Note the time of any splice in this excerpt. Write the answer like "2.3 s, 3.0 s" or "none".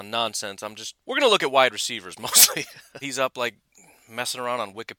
1.0 s, 3.0 s